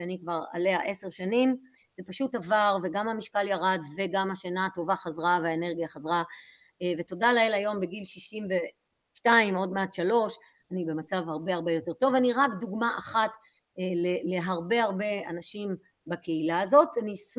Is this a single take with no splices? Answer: yes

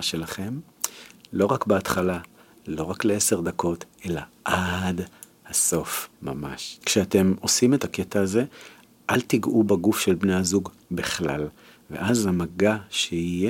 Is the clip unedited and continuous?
no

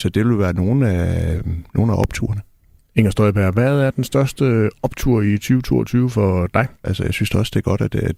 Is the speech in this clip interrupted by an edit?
yes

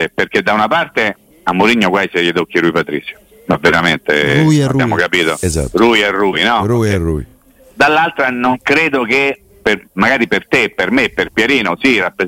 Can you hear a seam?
no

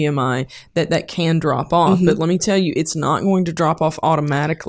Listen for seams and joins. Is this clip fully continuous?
yes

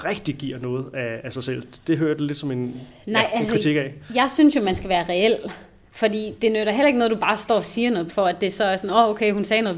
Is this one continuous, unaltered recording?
no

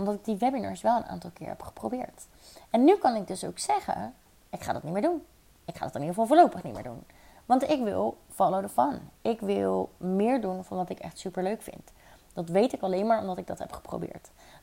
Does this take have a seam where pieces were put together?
no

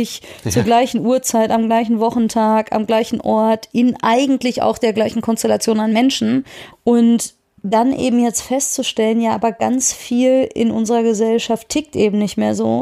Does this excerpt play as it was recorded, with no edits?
no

